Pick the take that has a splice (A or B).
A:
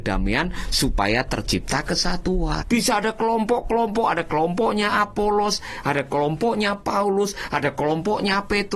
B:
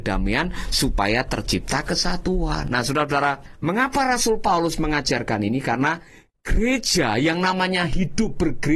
A